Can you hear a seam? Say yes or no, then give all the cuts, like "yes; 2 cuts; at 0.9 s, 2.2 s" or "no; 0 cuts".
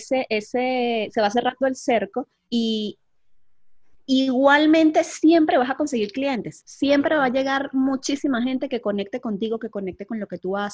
no; 0 cuts